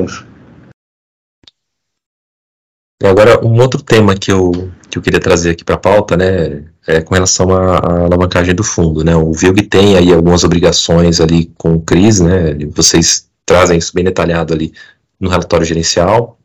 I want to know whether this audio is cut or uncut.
uncut